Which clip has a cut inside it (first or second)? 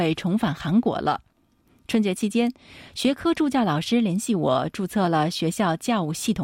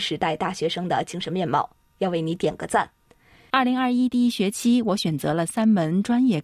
second